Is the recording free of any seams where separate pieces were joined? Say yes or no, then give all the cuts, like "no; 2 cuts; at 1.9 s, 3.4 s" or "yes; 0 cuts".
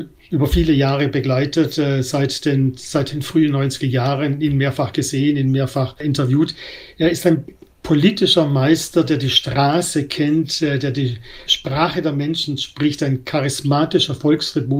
yes; 0 cuts